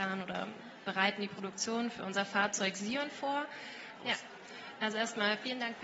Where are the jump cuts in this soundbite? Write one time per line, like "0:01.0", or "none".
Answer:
0:04.0